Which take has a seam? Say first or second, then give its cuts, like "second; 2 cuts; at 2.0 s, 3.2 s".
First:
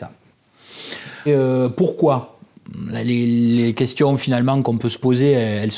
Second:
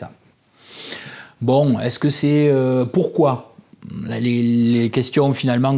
first; 1 cut; at 1.3 s